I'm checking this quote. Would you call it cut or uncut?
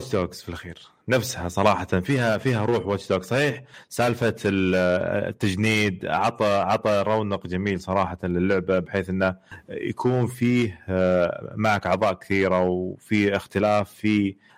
uncut